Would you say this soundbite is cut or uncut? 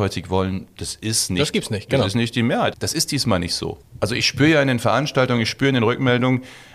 cut